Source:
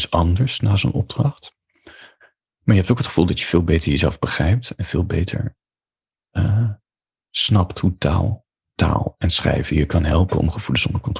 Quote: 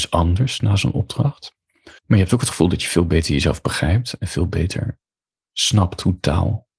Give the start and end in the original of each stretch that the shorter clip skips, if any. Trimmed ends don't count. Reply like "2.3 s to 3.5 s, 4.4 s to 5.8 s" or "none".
2.0 s to 2.6 s, 6.0 s to 7.2 s